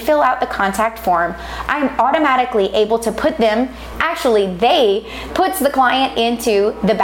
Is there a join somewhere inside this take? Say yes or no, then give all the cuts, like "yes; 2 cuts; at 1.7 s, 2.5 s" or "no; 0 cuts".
yes; 1 cut; at 5.3 s